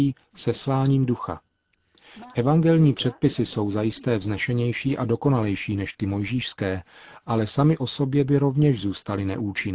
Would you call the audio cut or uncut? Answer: uncut